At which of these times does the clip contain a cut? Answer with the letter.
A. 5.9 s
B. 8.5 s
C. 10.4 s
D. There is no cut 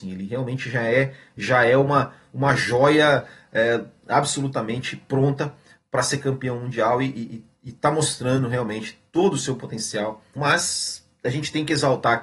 C